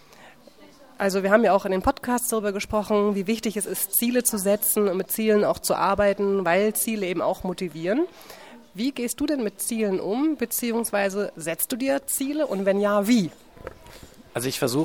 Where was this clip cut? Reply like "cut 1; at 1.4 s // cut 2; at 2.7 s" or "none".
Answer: none